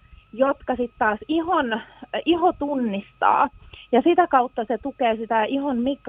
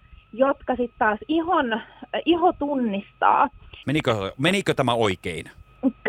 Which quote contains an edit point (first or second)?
second